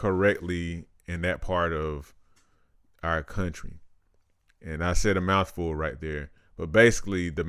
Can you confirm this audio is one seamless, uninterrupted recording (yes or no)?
yes